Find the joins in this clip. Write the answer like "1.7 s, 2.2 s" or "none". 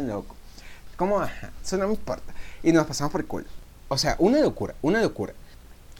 0.9 s